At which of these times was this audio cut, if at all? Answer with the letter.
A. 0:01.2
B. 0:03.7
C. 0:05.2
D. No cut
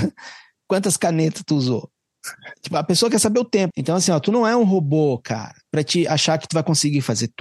B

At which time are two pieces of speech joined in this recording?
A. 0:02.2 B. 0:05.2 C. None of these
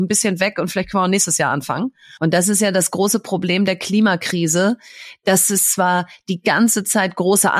A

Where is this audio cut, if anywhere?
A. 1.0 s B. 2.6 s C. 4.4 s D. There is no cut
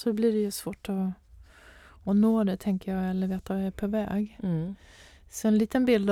D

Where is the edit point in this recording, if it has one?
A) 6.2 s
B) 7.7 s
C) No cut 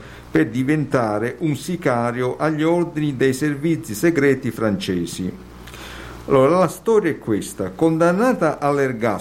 A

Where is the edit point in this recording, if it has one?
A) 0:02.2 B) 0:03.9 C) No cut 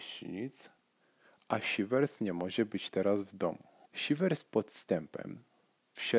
B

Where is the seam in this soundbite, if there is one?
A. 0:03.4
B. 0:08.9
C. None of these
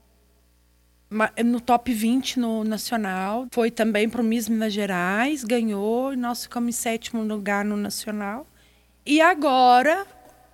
A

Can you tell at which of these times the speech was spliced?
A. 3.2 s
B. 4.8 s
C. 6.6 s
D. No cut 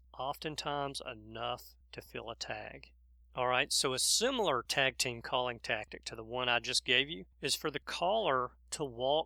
A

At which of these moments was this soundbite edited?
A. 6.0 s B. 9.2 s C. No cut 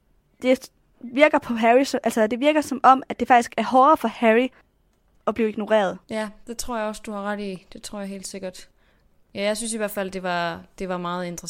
A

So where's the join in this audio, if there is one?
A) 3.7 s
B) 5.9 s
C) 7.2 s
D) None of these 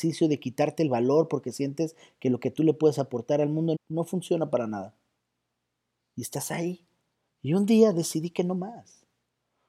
A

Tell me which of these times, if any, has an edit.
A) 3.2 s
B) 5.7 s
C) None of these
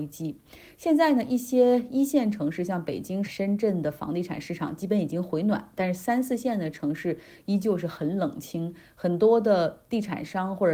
A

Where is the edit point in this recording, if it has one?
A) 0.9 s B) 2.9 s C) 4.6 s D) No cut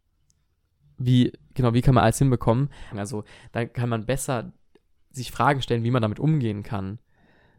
B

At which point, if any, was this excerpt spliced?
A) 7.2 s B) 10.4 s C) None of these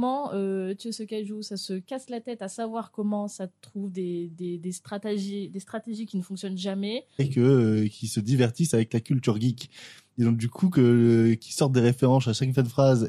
A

